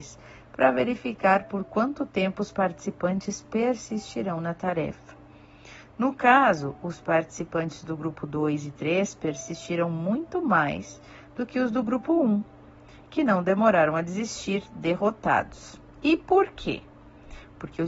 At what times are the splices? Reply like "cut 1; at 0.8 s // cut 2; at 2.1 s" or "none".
none